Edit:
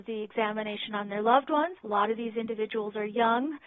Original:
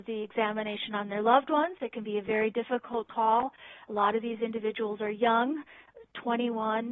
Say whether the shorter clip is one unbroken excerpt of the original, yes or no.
no